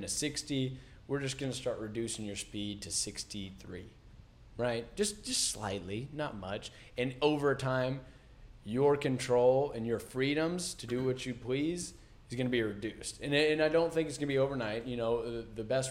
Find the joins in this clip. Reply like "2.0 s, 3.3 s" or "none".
none